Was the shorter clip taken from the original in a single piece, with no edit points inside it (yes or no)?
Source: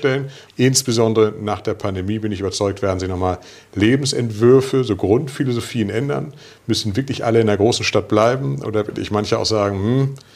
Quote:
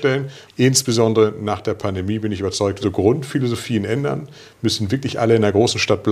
no